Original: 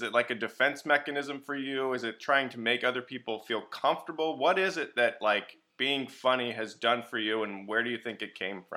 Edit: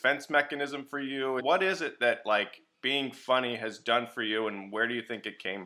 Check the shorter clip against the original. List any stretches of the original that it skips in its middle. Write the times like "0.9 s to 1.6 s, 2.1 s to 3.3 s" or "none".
2.0 s to 4.4 s